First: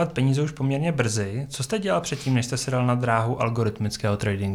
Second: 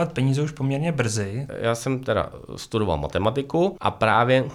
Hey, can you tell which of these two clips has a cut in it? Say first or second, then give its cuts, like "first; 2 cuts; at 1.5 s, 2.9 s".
second; 1 cut; at 1.5 s